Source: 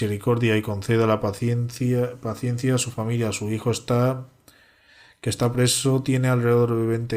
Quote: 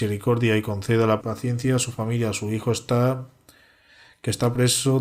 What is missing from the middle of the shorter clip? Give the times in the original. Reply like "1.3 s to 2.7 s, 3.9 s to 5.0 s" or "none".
1.2 s to 2.2 s